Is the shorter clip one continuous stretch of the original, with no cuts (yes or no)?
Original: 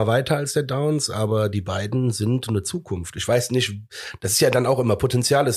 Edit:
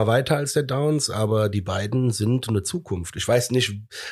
yes